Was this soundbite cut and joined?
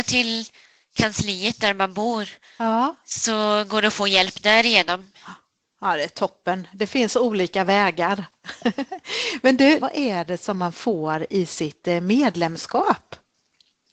yes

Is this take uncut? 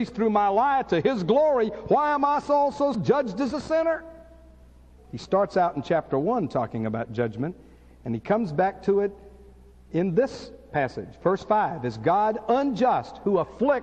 no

